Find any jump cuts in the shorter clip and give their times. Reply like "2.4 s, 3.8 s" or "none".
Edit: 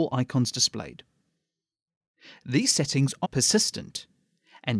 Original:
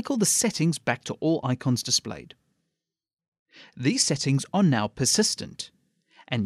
3.2 s